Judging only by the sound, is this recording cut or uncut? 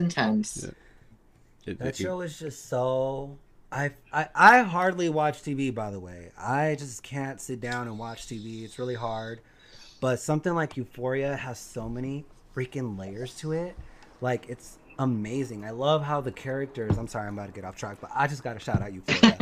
uncut